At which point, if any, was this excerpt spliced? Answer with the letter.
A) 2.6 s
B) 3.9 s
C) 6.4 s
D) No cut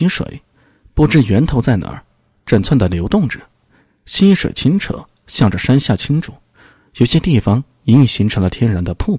A